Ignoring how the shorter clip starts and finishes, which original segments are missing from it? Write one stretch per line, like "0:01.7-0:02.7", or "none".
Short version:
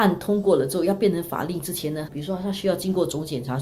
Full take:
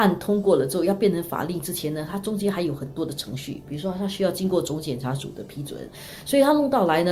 0:02.1-0:03.6